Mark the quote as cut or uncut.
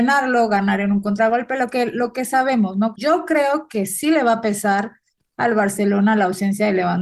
cut